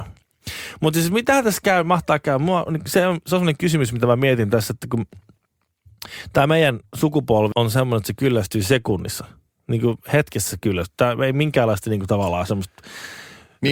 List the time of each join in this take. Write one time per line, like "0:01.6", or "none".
0:07.5